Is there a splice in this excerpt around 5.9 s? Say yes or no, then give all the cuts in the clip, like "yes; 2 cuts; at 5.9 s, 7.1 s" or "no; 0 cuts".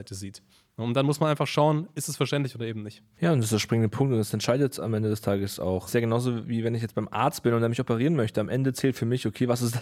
yes; 1 cut; at 5.9 s